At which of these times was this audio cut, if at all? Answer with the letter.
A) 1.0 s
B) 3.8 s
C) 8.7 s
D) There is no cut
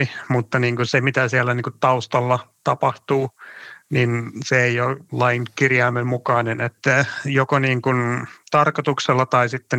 D